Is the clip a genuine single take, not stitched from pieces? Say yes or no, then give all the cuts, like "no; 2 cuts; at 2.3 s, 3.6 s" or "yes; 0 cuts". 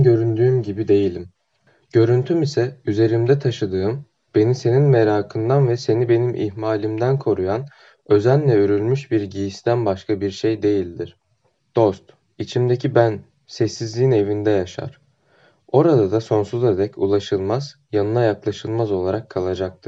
yes; 0 cuts